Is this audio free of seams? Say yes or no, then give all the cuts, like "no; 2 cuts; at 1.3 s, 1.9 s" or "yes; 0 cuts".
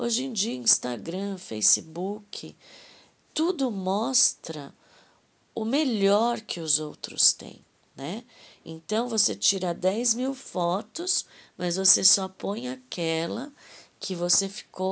yes; 0 cuts